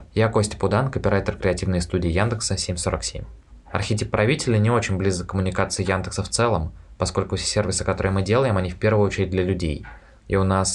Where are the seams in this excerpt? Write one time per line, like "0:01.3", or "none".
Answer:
none